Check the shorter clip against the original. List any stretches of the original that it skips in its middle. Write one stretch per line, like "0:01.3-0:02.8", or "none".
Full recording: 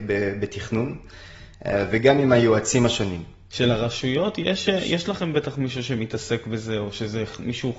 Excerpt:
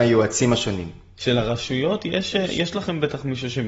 none